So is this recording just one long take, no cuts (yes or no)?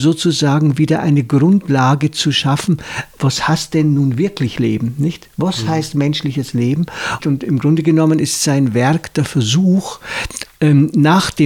no